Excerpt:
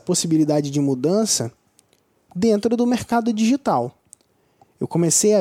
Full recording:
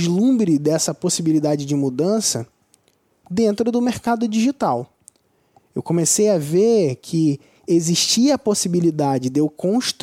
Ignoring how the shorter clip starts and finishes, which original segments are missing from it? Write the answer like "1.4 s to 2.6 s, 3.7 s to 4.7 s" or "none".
none